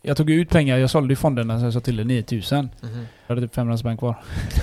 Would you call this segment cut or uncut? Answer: cut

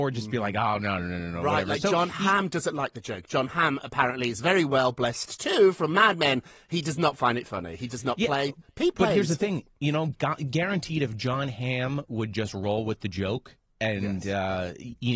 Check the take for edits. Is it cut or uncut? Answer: uncut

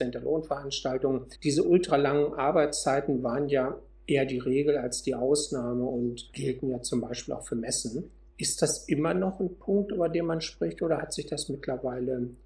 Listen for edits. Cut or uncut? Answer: cut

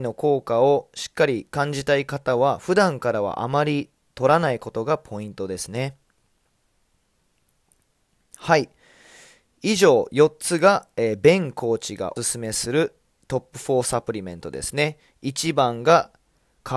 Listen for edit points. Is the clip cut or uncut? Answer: cut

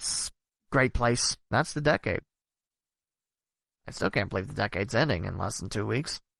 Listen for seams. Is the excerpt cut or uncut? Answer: cut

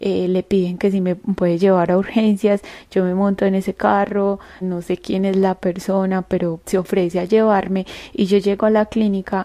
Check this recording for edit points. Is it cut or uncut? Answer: cut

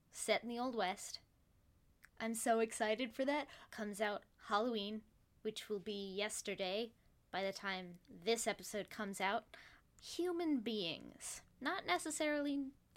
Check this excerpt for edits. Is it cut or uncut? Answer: cut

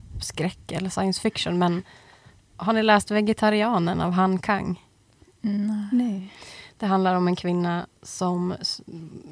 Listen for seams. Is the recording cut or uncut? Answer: uncut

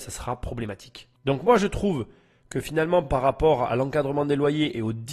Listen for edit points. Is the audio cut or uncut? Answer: uncut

